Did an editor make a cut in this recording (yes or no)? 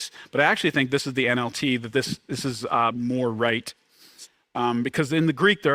no